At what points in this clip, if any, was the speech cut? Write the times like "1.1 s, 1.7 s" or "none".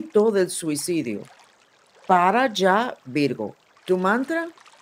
3.8 s